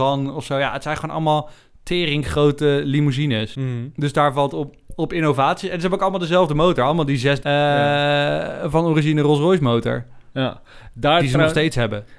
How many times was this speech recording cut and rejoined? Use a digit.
1